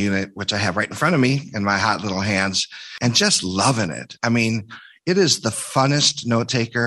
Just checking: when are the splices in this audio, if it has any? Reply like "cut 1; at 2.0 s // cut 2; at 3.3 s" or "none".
none